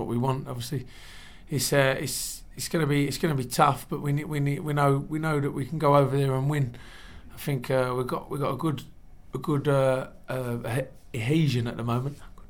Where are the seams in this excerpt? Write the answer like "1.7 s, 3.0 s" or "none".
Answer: none